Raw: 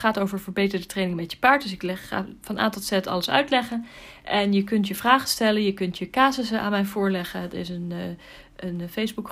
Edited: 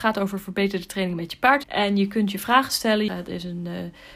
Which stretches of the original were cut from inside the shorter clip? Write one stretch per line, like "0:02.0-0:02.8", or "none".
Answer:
0:01.6-0:04.2
0:05.6-0:07.3